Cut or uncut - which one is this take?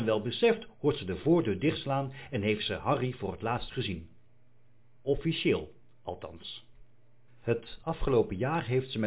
uncut